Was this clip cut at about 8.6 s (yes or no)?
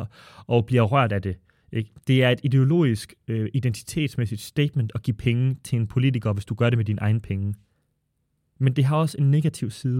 yes